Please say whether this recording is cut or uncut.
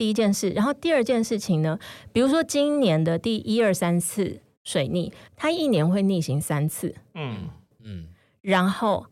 cut